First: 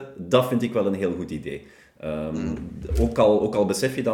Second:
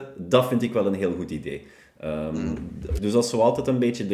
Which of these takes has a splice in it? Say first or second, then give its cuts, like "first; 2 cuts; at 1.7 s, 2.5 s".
second; 1 cut; at 3.0 s